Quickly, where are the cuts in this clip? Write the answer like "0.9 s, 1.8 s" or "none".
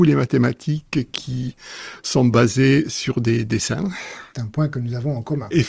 4.3 s